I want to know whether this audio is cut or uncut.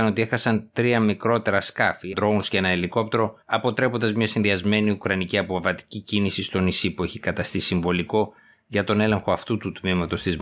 cut